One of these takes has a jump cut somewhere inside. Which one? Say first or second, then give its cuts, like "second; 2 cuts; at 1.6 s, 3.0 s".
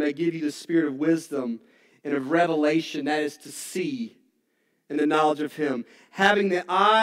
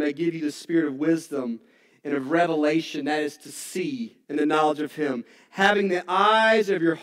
second; 1 cut; at 4.2 s